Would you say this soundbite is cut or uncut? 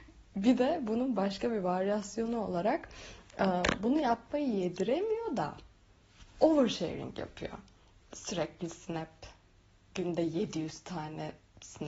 uncut